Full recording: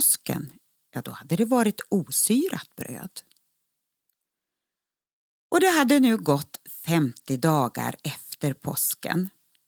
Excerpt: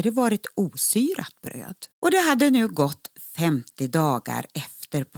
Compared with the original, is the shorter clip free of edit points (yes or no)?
no